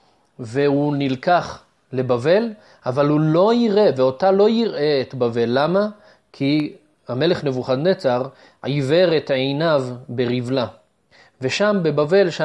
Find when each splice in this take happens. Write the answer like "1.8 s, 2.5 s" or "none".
none